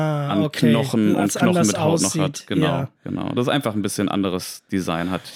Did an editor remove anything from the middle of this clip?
no; 0 cuts

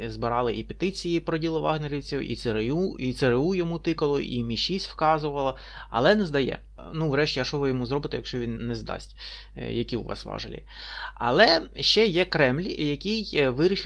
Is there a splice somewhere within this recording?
yes; 1 cut; at 8.6 s

